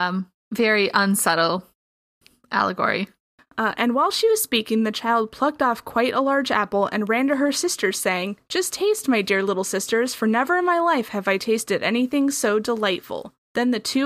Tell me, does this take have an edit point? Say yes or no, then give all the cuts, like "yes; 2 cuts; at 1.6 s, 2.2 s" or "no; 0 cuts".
no; 0 cuts